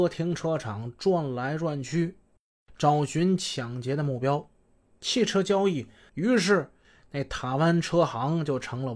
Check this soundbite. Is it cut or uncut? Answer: cut